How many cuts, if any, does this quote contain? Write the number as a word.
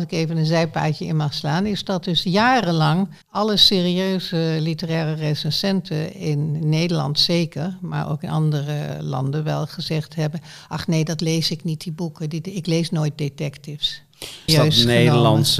two